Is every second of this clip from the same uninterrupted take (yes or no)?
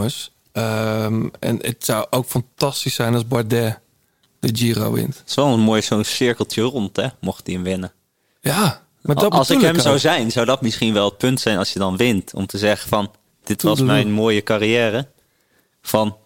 yes